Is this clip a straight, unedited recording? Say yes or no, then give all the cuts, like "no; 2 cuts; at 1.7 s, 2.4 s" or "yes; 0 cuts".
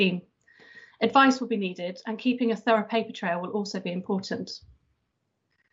yes; 0 cuts